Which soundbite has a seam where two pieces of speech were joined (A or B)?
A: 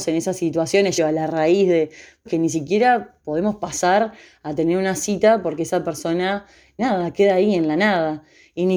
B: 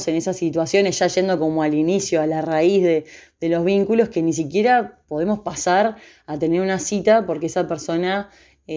A